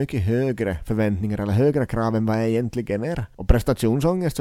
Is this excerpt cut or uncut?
uncut